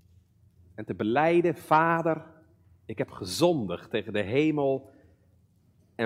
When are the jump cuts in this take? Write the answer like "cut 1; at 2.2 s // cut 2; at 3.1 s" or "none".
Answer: none